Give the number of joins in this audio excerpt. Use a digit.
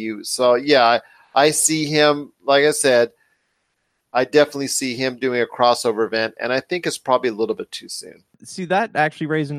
2